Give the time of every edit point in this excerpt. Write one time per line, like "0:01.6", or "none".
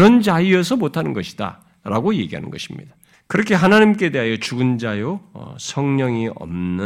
0:03.1

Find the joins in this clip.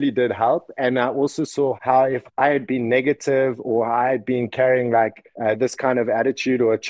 0:05.3

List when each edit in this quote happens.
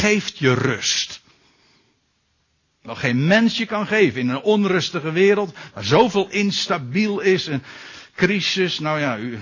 none

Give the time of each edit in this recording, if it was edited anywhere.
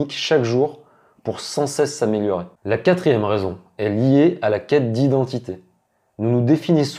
0:02.5

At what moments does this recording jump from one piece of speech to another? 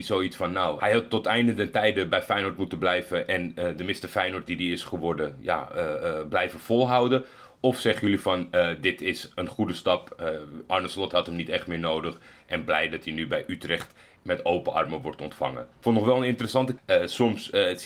0:15.7
0:16.8

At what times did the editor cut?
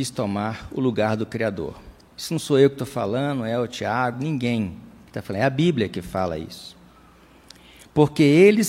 0:02.1
0:04.1

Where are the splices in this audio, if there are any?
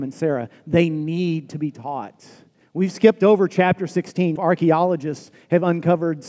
0:02.6
0:04.4

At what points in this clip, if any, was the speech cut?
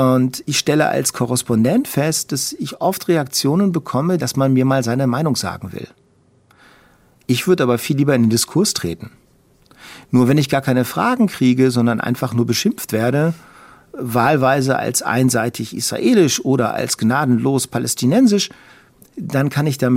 0:04.2

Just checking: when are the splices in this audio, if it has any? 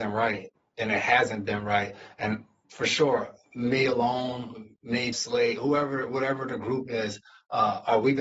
0:05.1

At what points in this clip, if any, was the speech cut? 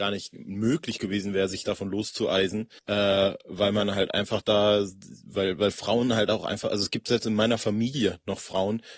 0:02.8

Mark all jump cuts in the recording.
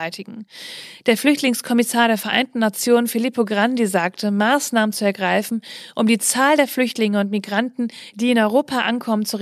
none

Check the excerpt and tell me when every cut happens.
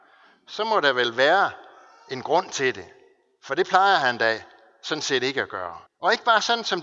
0:05.9

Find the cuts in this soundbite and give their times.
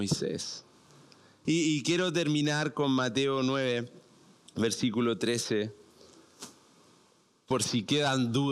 0:01.5

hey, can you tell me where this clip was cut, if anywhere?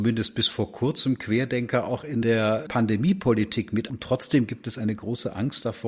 0:03.9

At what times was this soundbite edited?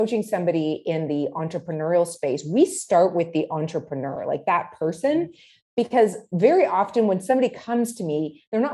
none

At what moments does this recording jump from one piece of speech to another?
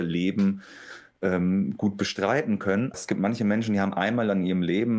0:02.9

